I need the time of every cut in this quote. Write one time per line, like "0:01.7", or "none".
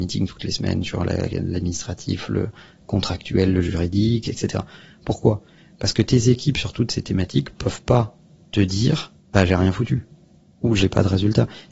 none